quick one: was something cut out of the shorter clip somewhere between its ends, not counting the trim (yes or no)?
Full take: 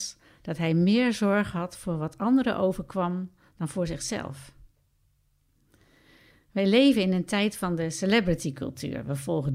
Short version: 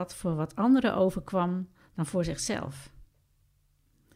no